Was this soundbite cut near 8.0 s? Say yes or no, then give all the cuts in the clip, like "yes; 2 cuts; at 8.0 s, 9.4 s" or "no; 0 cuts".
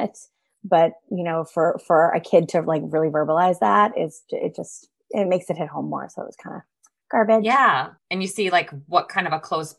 yes; 1 cut; at 8.0 s